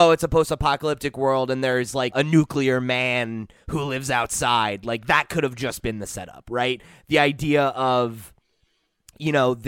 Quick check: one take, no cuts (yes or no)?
no